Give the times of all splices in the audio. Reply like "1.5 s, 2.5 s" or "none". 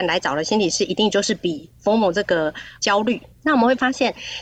3.3 s